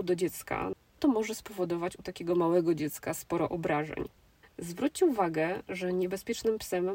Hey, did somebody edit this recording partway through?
yes; 1 cut; at 4.4 s

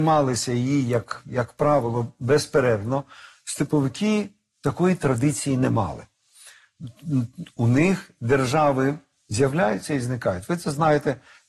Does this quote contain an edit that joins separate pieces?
no; 0 cuts

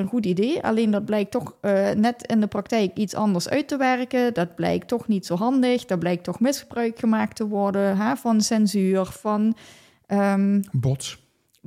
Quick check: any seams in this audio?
no; 0 cuts

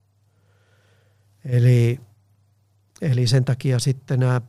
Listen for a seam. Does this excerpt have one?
no; 0 cuts

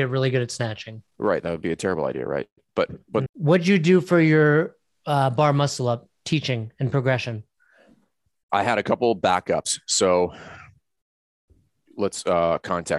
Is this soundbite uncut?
no; 1 cut; at 3.3 s

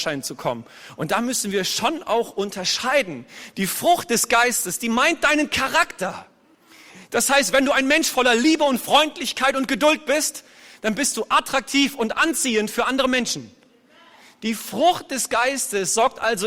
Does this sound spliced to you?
no; 0 cuts

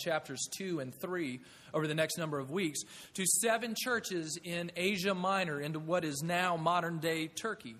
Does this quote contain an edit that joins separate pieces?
no; 0 cuts

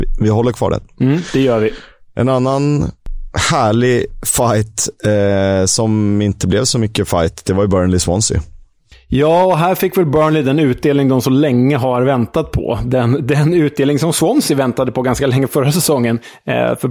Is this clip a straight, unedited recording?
yes; 0 cuts

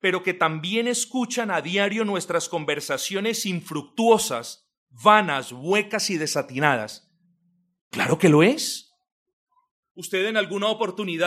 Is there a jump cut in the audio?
yes; 1 cut; at 7.8 s

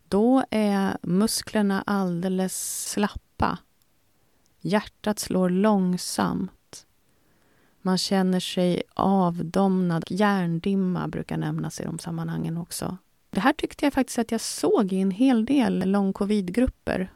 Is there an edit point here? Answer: yes; 1 cut; at 10.0 s

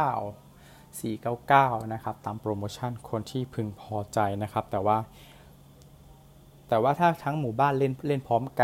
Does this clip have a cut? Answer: no; 0 cuts

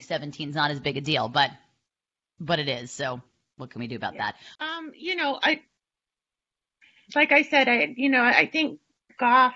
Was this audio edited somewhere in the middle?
yes; 1 cut; at 4.6 s

